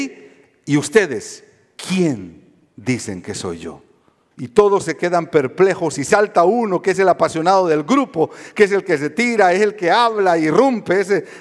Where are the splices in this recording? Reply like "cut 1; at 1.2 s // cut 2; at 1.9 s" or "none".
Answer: cut 1; at 4.3 s